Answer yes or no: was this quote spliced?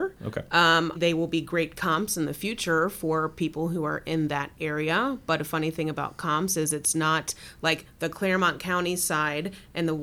yes